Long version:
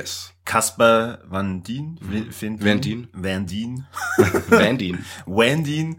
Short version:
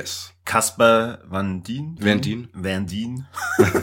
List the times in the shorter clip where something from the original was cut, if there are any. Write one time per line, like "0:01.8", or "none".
0:02.0